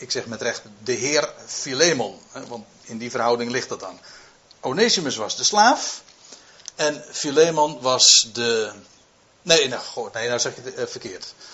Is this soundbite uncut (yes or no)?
yes